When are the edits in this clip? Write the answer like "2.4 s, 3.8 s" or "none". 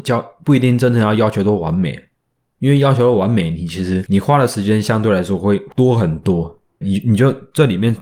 6.8 s